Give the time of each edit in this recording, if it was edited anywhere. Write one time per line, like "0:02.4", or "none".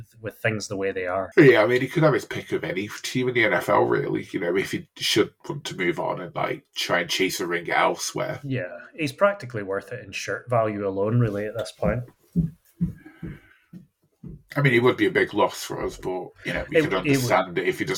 none